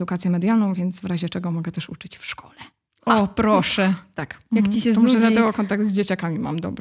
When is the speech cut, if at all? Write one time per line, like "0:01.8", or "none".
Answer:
none